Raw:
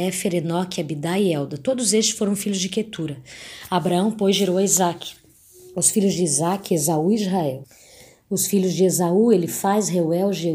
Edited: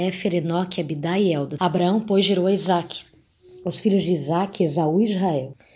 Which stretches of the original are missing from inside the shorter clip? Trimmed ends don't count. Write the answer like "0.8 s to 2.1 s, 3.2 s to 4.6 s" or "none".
1.6 s to 3.7 s